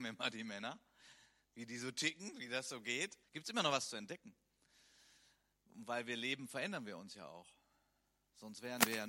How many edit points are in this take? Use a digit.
1